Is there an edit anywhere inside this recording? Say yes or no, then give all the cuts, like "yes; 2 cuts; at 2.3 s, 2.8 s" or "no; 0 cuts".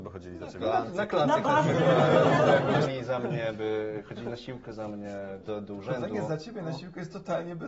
yes; 2 cuts; at 2.8 s, 5.4 s